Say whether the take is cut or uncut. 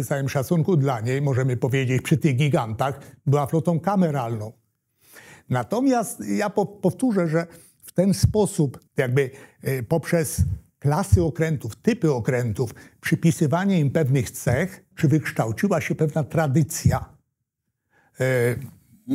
cut